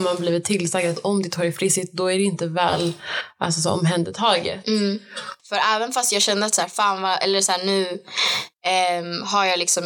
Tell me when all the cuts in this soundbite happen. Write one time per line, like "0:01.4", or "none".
0:05.4